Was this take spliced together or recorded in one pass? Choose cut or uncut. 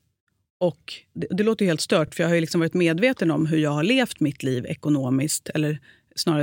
uncut